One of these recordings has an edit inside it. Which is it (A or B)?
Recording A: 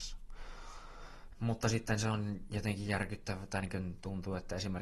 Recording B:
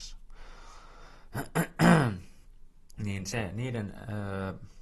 A